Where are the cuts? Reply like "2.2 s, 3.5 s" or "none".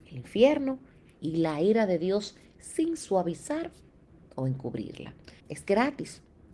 5.4 s